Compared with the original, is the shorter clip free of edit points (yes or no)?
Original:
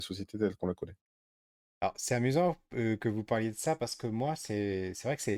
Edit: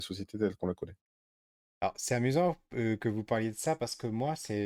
yes